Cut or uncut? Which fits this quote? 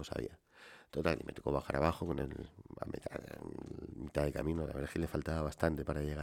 uncut